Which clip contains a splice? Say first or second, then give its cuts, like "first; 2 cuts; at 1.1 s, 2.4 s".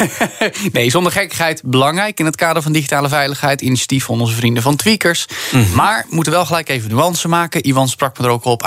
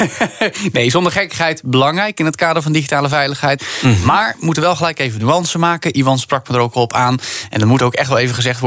second; 1 cut; at 3.6 s